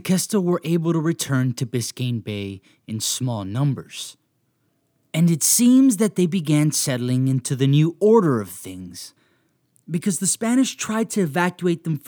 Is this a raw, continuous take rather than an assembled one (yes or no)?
yes